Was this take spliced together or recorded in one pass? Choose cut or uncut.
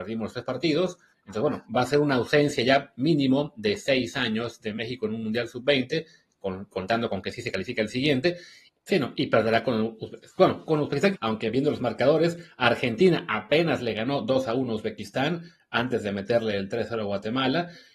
cut